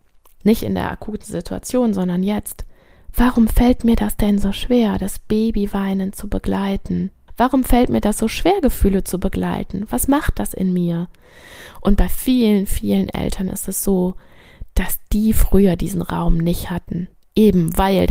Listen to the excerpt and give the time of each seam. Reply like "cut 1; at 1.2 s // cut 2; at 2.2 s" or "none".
cut 1; at 7.3 s // cut 2; at 12.7 s